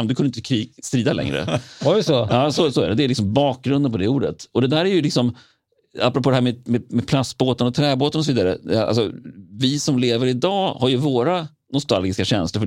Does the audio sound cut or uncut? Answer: uncut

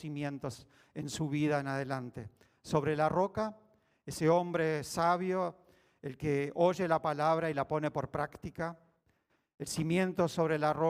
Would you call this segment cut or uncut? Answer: uncut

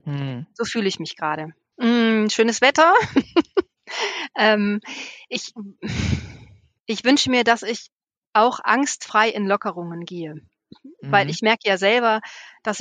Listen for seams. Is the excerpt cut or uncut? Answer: cut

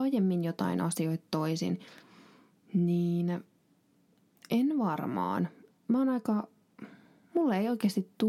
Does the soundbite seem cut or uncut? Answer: uncut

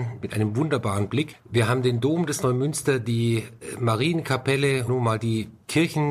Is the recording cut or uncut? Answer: cut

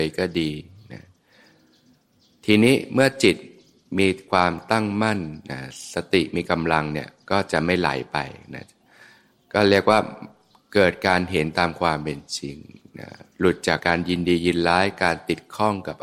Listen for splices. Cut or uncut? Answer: cut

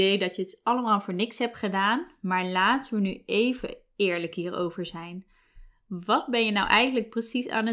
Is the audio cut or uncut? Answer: uncut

